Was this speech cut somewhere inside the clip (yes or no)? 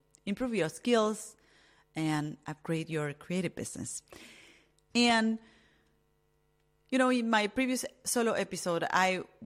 yes